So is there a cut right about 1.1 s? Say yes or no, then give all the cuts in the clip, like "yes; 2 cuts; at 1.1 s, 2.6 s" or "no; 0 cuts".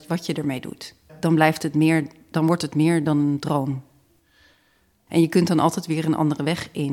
yes; 2 cuts; at 1.1 s, 5.1 s